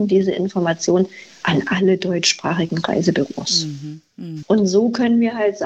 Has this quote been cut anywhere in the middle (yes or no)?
yes